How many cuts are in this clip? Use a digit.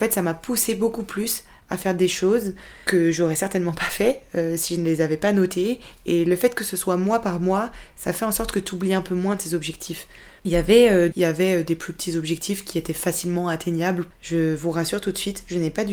2